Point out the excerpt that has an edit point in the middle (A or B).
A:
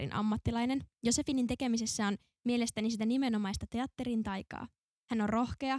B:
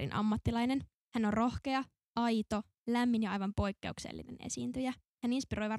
B